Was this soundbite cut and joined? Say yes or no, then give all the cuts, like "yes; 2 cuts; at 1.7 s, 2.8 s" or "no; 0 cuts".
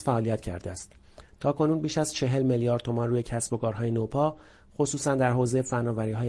no; 0 cuts